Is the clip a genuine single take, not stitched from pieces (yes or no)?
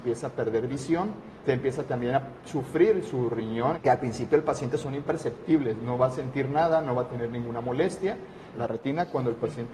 no